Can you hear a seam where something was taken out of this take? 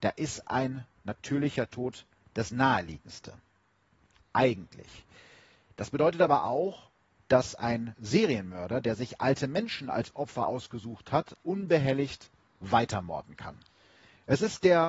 yes; 1 cut; at 11.4 s

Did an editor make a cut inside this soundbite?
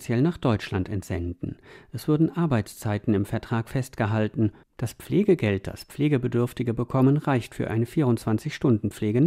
yes; 1 cut; at 4.6 s

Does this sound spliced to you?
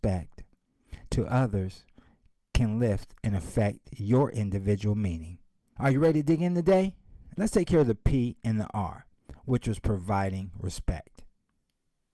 yes; 2 cuts; at 5.8 s, 7.4 s

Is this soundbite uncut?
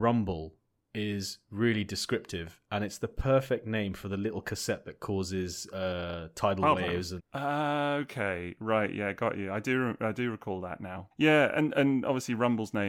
no; 2 cuts; at 7.2 s, 11.1 s

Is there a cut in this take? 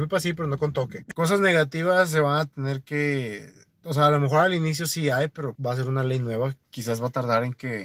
yes; 2 cuts; at 1.1 s, 5.6 s

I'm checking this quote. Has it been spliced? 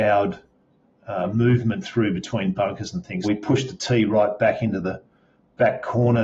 yes; 1 cut; at 3.2 s

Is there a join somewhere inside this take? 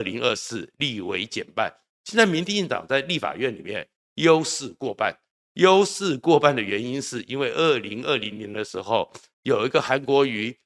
no; 0 cuts

